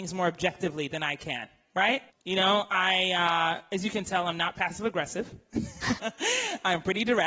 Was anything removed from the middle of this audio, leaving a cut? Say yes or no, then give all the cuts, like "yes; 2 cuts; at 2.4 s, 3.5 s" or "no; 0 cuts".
yes; 2 cuts; at 2.1 s, 6.0 s